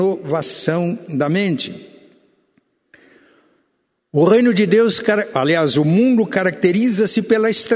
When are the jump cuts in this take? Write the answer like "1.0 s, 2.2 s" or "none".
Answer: none